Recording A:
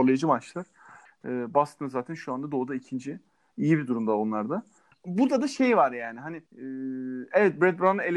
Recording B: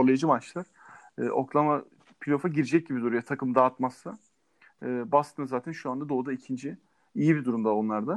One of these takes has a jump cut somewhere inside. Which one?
A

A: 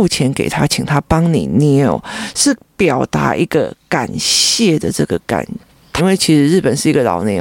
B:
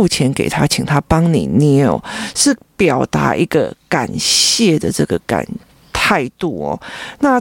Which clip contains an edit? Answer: A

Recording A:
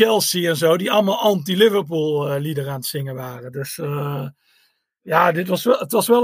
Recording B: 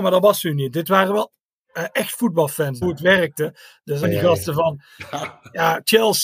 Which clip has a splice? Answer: B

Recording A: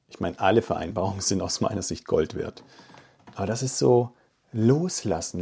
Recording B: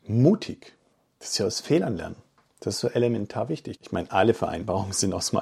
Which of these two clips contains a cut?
B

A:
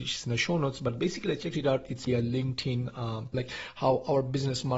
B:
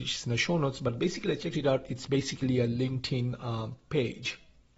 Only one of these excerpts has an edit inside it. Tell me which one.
A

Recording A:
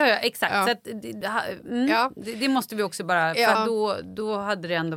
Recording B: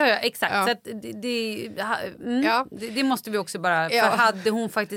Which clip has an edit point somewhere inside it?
A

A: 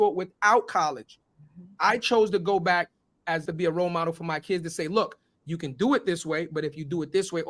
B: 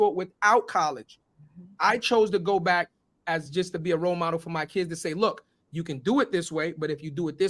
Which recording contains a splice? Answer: A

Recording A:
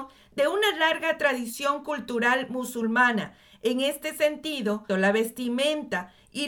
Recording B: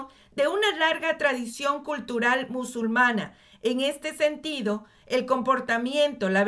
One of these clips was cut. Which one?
A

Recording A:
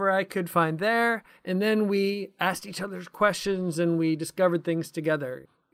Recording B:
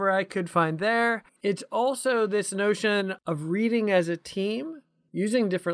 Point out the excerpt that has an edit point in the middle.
B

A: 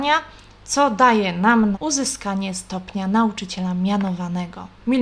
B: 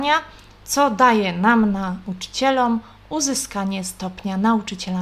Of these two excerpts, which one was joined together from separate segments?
A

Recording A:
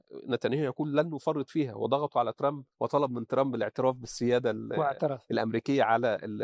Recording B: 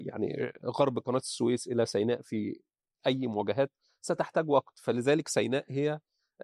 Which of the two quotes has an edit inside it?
A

